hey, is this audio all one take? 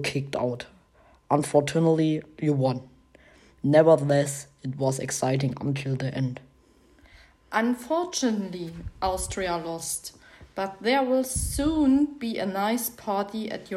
yes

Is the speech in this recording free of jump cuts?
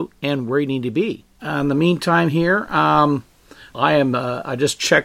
no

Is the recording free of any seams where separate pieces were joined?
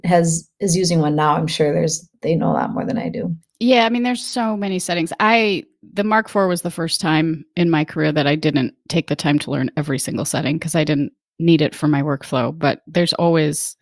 yes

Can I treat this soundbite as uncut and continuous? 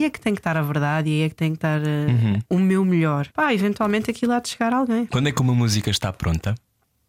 no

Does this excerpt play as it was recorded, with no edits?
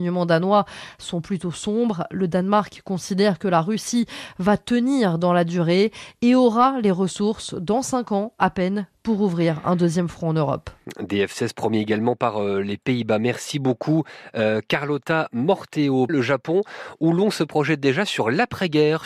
no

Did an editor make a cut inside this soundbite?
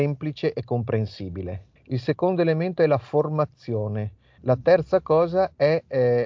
yes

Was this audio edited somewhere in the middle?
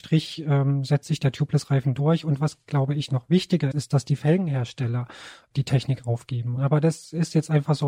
yes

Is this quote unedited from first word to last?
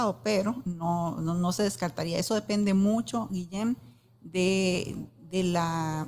yes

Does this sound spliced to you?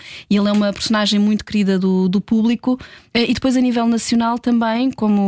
yes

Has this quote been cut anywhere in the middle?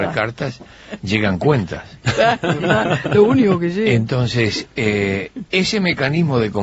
yes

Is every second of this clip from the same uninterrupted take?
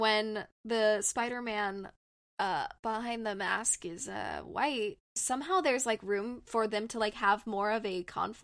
yes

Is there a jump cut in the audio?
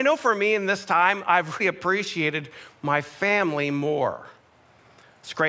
yes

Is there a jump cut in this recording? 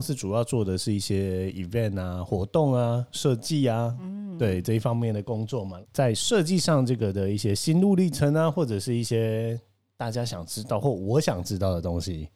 yes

